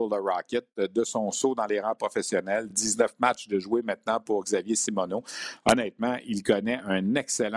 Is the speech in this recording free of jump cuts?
yes; 0 cuts

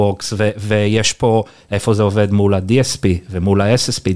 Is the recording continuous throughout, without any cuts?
yes; 0 cuts

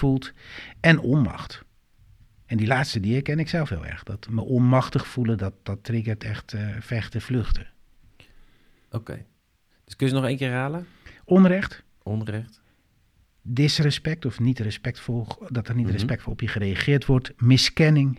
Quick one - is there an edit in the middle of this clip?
yes; 1 cut; at 4.3 s

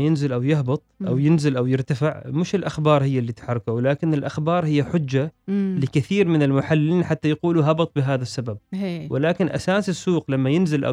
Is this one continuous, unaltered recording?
yes; 0 cuts

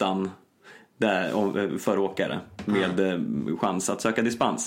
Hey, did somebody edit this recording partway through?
no; 0 cuts

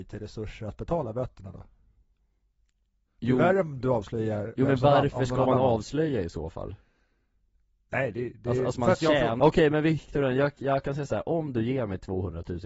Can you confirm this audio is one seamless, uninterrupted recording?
no; 1 cut; at 9.4 s

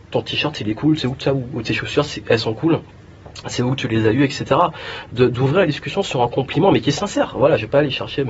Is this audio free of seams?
yes; 0 cuts

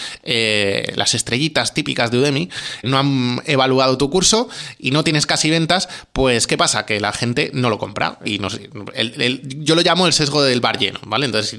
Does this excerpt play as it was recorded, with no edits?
no; 2 cuts; at 2.8 s, 8.3 s

